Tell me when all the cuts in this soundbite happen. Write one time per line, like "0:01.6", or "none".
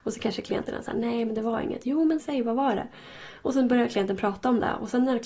0:02.2